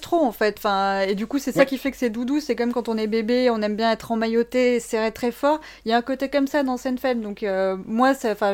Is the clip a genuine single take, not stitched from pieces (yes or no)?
yes